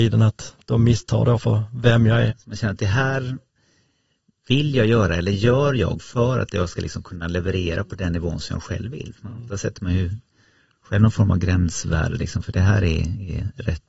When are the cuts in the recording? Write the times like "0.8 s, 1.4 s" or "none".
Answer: 2.3 s